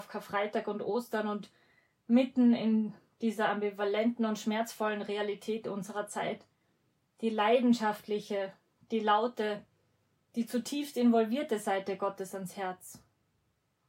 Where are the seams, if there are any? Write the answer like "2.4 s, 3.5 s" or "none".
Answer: none